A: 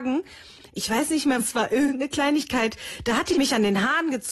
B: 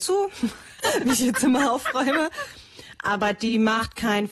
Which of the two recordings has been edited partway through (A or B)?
A